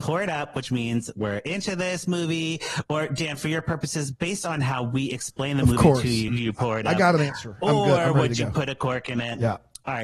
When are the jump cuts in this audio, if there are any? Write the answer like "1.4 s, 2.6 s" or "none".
6.3 s